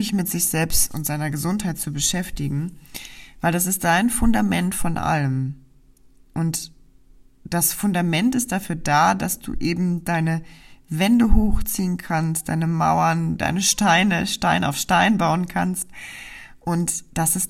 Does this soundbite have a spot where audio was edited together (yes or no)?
no